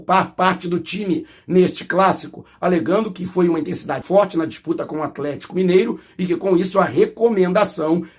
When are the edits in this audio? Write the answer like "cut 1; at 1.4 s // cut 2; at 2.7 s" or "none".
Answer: cut 1; at 4.0 s